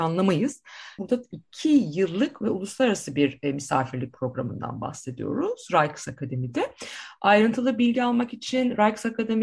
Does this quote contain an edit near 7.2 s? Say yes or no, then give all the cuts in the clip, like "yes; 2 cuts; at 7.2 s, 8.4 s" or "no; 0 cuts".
no; 1 cut; at 1.0 s